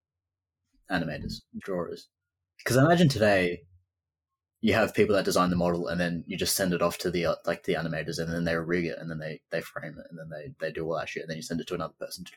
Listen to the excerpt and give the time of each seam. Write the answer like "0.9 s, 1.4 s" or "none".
1.6 s